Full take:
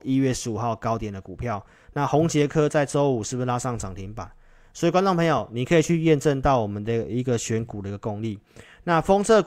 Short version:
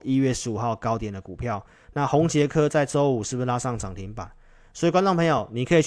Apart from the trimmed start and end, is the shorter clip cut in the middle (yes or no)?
no